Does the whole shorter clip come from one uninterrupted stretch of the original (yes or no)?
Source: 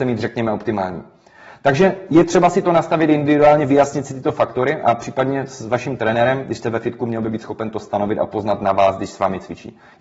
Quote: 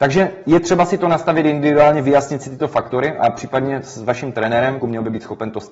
no